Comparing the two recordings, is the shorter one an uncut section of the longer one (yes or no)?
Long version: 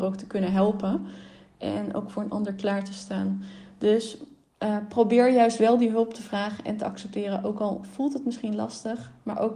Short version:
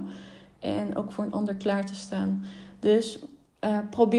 yes